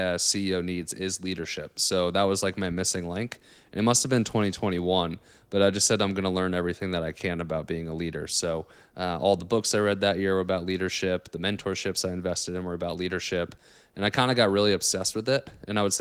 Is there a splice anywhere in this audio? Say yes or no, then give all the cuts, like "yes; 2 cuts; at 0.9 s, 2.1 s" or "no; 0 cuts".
no; 0 cuts